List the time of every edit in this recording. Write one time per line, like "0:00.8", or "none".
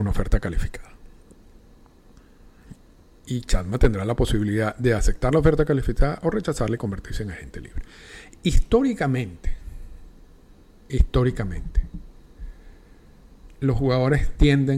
none